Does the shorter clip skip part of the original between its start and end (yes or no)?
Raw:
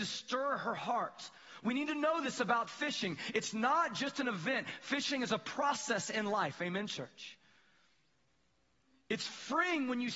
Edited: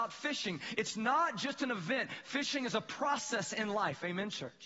no